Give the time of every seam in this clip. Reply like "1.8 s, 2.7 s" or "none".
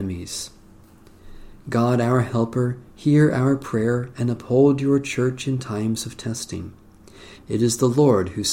7.4 s